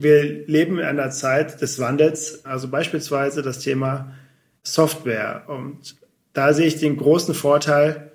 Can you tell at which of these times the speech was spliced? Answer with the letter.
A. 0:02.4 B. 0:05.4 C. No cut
A